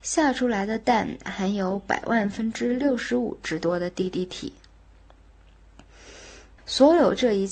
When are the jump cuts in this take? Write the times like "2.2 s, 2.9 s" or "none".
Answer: 6.6 s